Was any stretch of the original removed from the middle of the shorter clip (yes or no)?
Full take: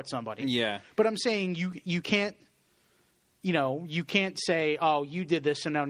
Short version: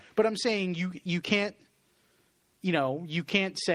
no